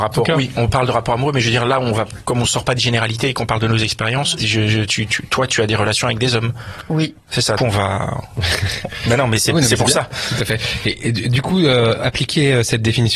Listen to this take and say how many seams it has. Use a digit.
1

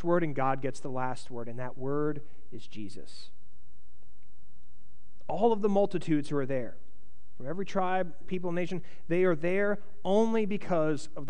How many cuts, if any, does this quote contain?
1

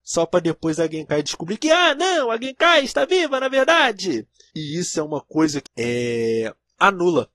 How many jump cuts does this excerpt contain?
1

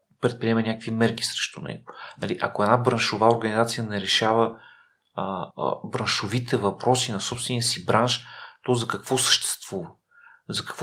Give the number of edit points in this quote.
1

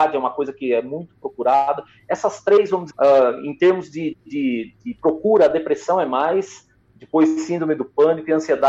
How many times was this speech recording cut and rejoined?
1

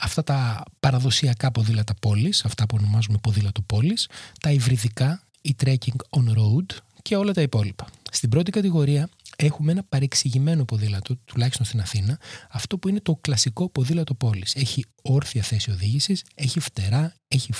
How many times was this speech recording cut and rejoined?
0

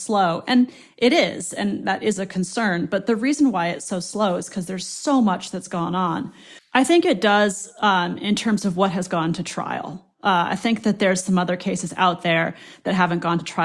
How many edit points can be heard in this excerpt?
1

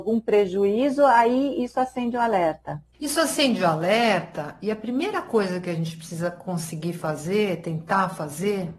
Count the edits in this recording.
0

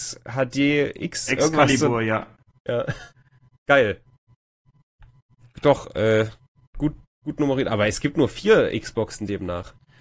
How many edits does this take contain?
0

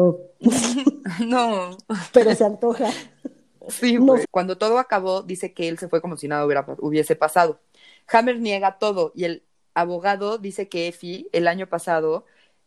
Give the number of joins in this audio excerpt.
1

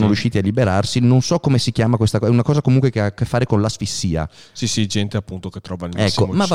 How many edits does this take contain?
1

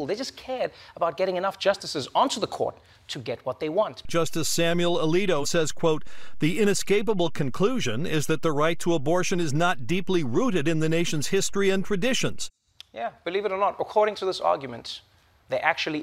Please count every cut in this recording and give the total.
1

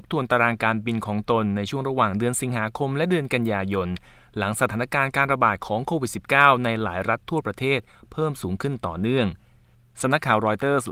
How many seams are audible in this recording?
0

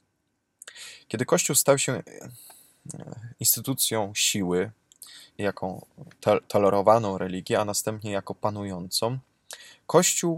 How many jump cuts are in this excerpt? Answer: 1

